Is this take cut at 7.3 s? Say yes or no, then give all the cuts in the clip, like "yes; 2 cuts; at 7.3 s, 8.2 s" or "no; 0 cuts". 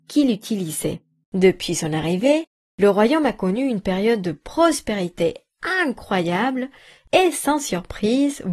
no; 1 cut; at 1.2 s